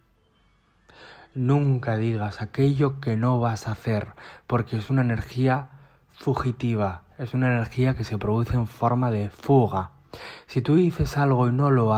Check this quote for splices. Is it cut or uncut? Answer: uncut